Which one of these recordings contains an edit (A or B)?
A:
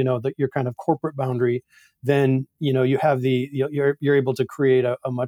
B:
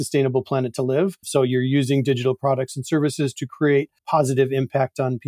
B